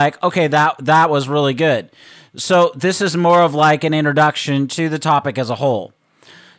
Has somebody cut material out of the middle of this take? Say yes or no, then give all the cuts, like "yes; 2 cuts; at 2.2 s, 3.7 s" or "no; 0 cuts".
no; 0 cuts